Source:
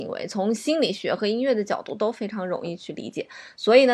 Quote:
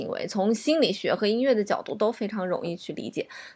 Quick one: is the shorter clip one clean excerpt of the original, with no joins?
yes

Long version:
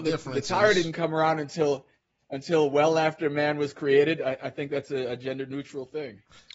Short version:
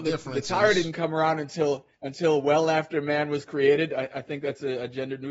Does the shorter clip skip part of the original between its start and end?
yes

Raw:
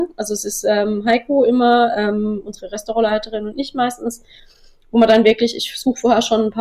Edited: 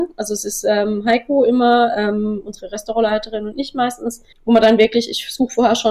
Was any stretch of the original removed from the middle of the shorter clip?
yes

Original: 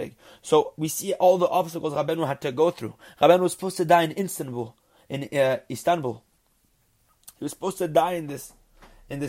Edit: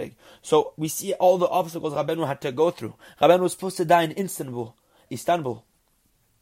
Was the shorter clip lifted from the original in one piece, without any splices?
no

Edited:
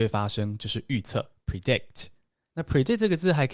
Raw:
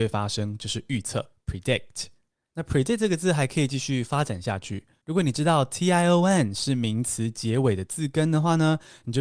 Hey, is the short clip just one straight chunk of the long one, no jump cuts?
yes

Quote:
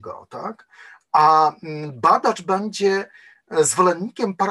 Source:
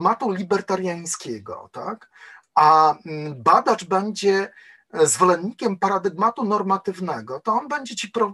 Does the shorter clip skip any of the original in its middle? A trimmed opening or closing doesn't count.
no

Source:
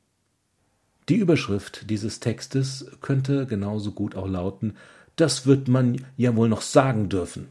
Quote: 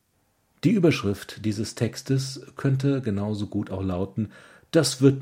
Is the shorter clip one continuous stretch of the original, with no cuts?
yes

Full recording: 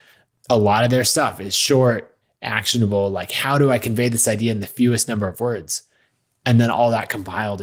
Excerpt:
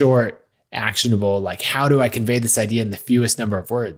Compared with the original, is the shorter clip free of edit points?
yes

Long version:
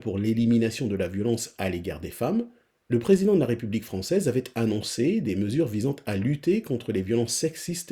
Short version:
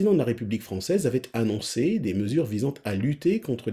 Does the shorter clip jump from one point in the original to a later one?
no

